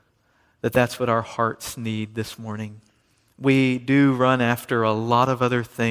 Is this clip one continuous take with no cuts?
yes; 0 cuts

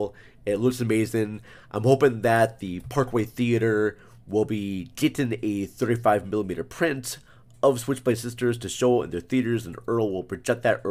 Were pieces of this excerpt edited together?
no; 0 cuts

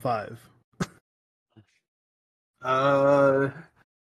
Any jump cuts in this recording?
no; 0 cuts

